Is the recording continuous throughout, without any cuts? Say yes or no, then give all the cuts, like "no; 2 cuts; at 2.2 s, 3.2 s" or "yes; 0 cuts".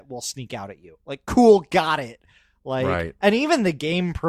yes; 0 cuts